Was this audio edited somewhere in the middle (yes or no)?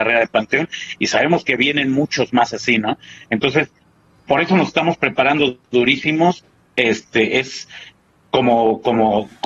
no